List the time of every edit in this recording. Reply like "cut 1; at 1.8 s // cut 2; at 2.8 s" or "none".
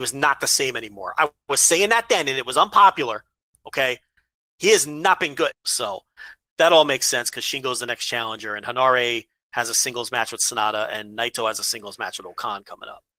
cut 1; at 5.5 s